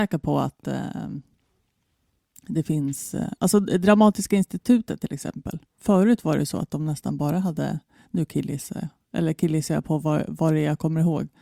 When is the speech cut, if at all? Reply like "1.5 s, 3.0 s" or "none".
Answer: none